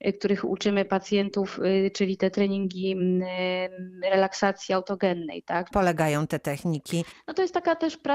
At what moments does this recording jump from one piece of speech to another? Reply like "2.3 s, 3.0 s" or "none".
5.7 s